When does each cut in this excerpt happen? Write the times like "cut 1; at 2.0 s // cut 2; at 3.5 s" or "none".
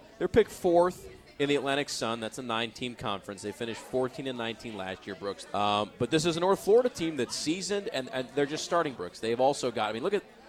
cut 1; at 5.5 s // cut 2; at 8.9 s

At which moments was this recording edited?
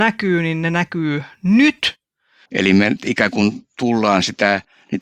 cut 1; at 2.5 s

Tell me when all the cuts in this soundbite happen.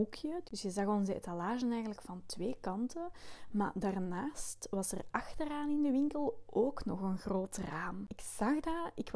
none

